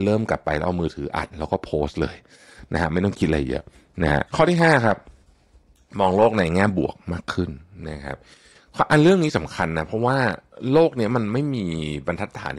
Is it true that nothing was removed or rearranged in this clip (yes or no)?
no